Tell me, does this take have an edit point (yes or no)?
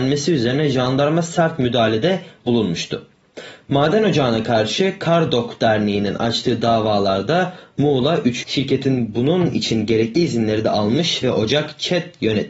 yes